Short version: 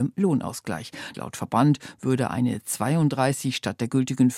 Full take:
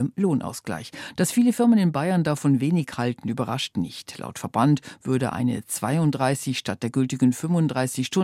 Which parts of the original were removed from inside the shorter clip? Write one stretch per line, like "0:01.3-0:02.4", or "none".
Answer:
0:01.1-0:04.2